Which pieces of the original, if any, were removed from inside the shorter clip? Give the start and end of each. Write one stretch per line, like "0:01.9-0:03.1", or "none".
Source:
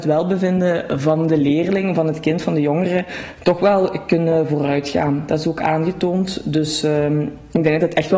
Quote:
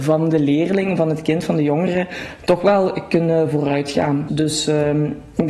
0:05.3-0:06.4